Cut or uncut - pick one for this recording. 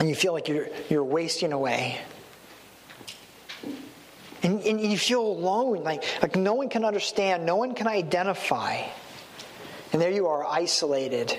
uncut